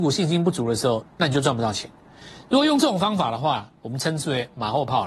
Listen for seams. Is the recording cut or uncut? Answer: cut